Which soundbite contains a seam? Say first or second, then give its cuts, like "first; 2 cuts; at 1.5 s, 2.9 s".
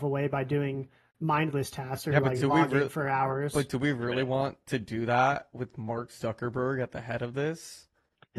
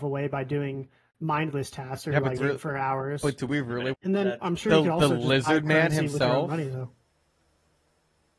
second; 2 cuts; at 2.4 s, 3.9 s